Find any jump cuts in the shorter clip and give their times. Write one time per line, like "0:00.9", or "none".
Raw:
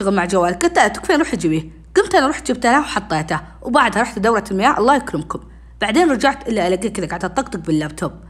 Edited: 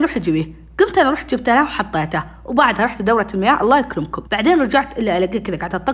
0:04.3